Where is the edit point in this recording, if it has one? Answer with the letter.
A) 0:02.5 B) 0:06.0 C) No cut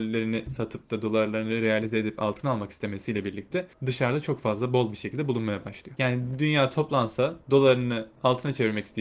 B